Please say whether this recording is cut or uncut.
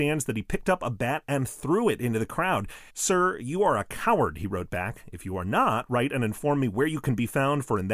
cut